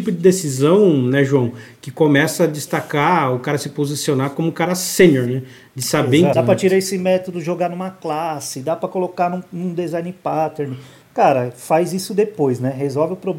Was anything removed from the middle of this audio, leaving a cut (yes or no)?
yes